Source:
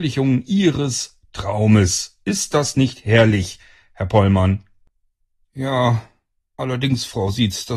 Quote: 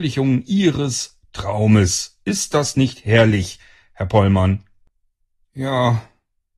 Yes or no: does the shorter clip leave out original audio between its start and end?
no